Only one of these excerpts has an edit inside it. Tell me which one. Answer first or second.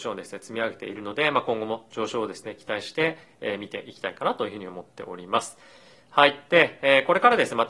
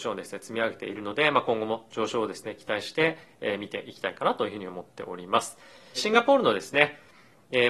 second